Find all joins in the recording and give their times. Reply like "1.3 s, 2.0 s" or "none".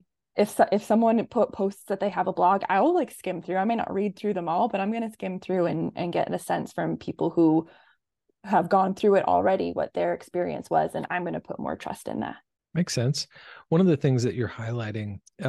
none